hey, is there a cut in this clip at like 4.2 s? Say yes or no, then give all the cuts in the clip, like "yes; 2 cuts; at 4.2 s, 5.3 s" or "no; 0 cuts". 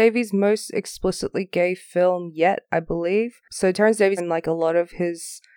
yes; 1 cut; at 4.2 s